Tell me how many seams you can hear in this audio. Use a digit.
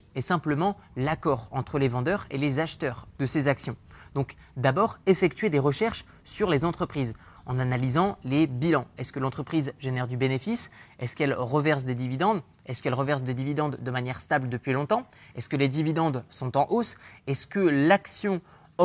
0